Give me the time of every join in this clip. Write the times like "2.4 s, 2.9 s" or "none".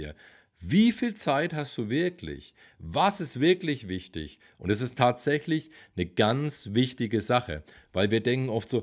4.5 s